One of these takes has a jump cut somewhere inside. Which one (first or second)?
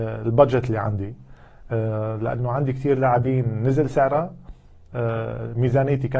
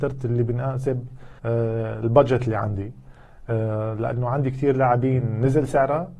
second